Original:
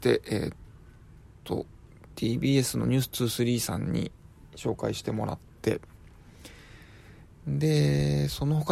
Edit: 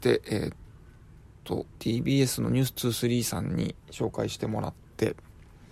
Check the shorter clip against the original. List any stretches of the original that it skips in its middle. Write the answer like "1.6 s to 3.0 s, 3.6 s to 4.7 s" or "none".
1.7 s to 2.1 s, 4.2 s to 4.5 s